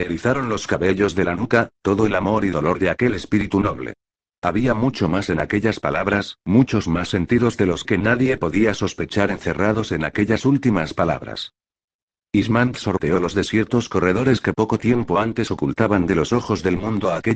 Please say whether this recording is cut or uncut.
uncut